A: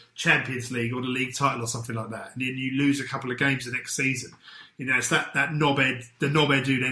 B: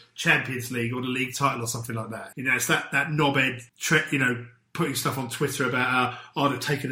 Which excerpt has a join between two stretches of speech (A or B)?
B